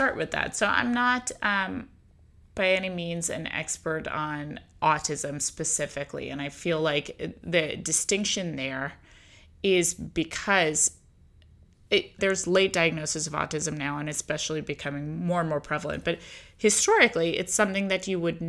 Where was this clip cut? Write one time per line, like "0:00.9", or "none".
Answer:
0:12.2